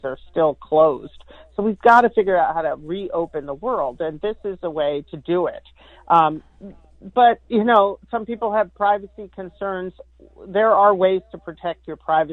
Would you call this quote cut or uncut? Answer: uncut